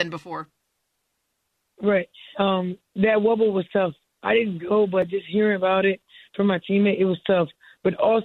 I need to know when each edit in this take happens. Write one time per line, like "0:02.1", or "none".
0:02.3